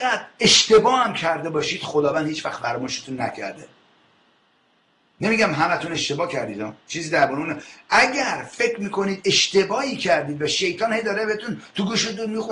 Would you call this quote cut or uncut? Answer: uncut